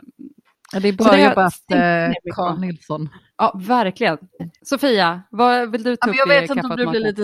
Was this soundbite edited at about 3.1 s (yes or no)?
no